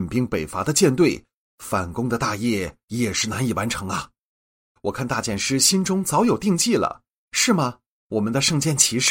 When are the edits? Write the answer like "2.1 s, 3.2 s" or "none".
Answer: 4.8 s

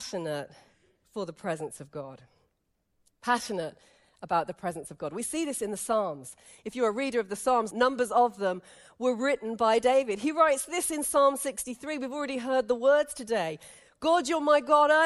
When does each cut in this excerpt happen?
7.7 s

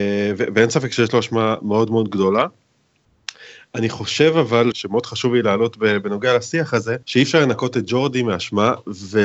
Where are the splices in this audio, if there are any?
4.7 s, 7.0 s

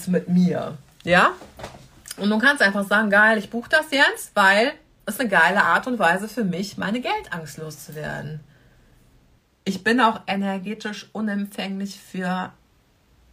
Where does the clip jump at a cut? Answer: none

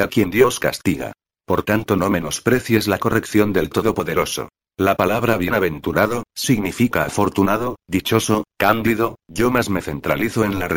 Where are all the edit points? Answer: none

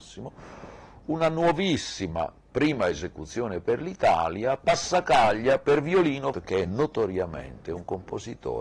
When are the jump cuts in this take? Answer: 6.3 s

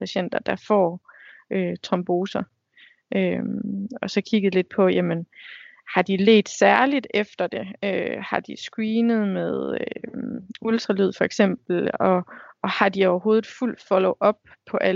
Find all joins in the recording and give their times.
none

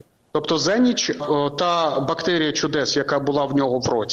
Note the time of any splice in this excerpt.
none

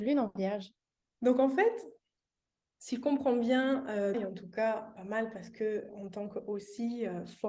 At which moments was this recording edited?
1.1 s, 4.1 s

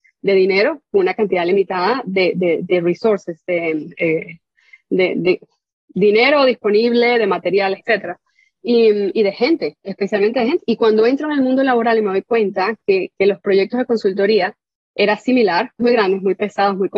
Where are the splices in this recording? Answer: 7.8 s, 10.6 s, 15.8 s

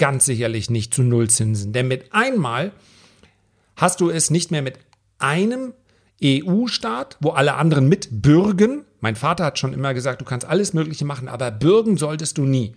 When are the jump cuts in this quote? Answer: none

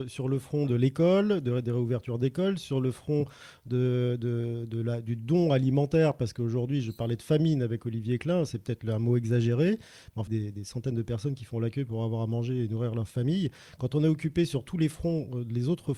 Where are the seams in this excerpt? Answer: 10.3 s

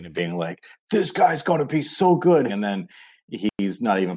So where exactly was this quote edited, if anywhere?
2.5 s

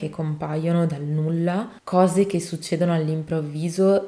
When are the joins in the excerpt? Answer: 1.8 s

